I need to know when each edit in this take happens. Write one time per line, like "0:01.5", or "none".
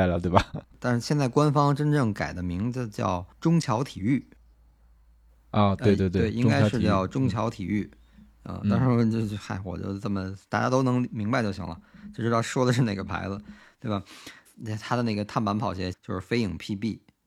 0:14.5
0:15.9